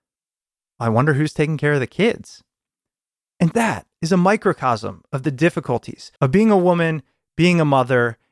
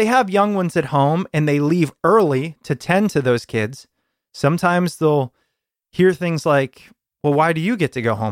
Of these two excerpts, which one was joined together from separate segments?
first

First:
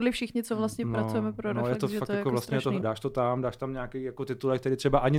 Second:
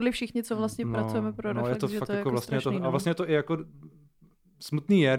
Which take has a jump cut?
first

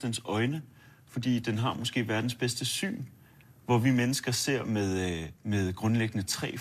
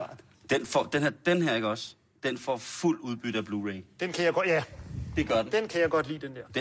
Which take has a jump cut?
first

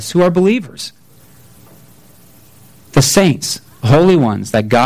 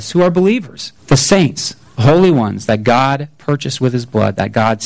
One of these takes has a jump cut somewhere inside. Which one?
second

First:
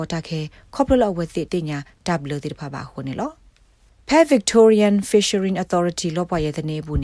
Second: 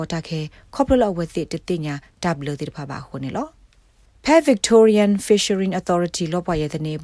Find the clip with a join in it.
first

